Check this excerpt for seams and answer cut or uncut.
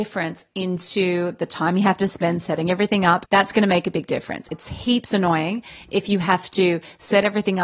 cut